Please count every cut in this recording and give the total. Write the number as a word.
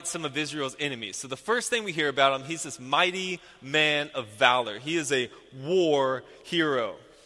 zero